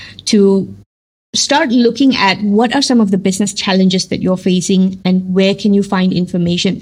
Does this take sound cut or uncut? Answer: uncut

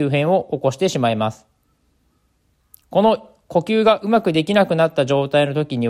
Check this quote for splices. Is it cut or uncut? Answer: uncut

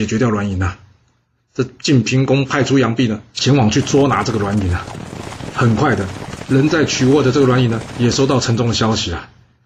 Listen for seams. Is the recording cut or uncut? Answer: uncut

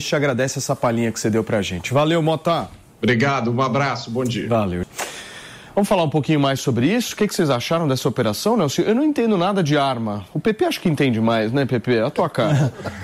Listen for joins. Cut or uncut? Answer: uncut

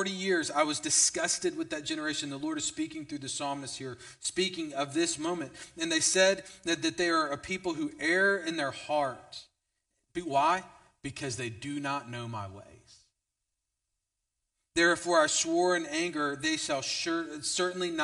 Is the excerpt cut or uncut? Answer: uncut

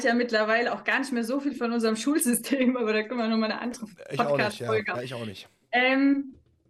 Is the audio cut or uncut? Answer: cut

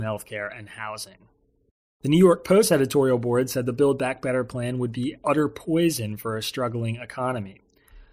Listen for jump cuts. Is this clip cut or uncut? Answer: uncut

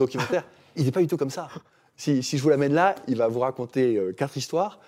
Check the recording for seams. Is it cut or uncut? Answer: uncut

